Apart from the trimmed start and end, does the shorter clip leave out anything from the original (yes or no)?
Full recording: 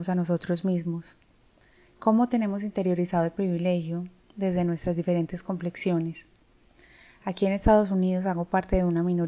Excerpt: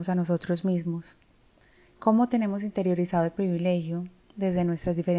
no